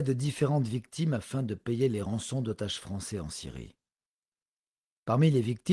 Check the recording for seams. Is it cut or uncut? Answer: uncut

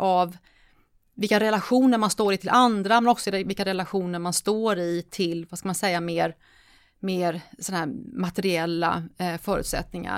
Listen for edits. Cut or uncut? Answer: uncut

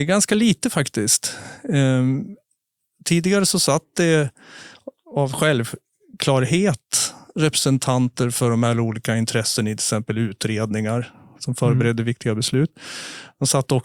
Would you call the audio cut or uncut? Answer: uncut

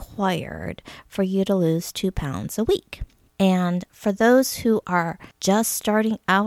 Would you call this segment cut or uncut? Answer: cut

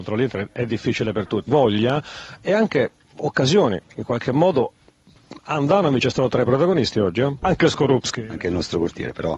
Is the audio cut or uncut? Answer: cut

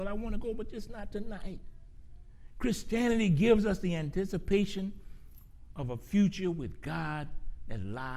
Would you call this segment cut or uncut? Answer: uncut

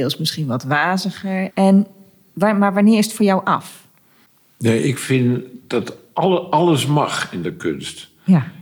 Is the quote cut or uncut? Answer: cut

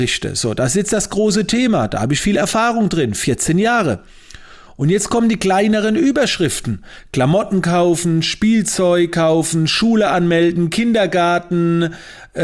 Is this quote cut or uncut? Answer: uncut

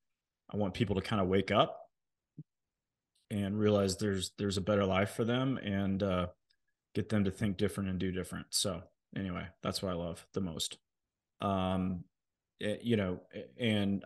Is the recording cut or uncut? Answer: cut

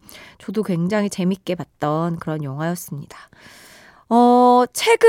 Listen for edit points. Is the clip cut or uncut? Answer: uncut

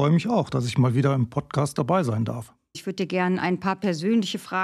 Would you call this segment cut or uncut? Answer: cut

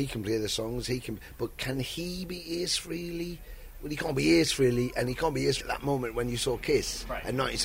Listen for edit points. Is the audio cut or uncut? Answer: cut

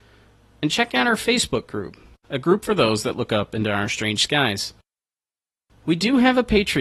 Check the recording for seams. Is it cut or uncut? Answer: cut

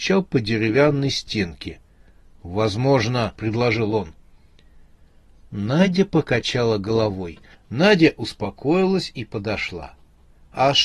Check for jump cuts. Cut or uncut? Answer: cut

